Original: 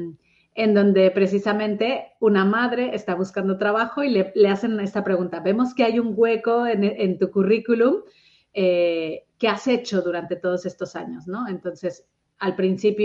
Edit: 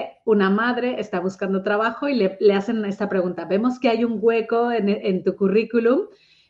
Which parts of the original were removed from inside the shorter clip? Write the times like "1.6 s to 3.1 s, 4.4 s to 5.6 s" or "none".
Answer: none